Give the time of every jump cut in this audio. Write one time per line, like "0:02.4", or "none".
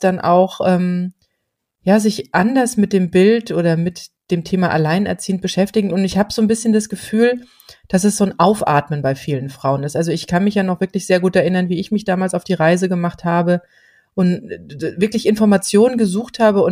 none